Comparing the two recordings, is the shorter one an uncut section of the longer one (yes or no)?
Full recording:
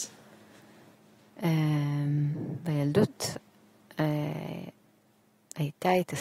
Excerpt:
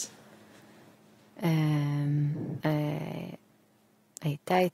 no